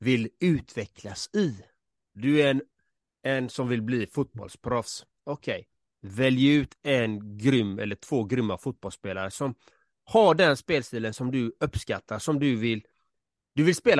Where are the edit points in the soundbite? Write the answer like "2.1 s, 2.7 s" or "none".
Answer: 2.2 s